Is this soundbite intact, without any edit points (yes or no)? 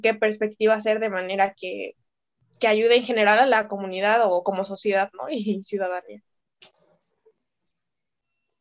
yes